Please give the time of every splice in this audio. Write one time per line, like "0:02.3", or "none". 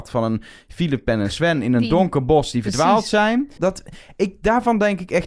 0:03.6